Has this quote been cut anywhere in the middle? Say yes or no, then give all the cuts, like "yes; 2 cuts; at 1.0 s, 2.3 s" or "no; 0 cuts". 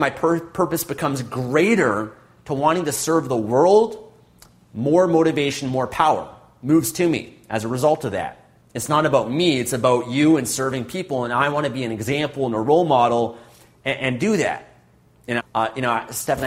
yes; 2 cuts; at 8.6 s, 15.4 s